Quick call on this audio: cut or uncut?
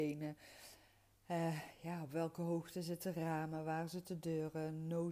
uncut